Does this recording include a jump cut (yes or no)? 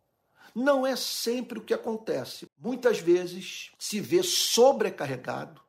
yes